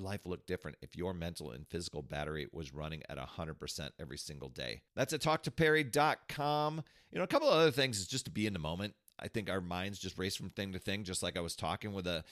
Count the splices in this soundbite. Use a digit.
1